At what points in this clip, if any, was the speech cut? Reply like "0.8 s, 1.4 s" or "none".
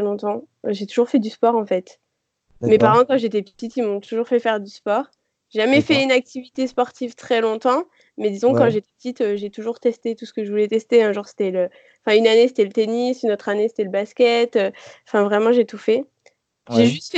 none